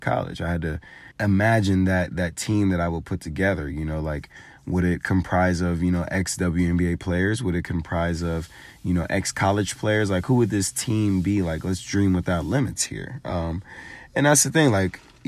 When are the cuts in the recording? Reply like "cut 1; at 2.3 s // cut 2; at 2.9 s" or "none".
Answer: cut 1; at 1.1 s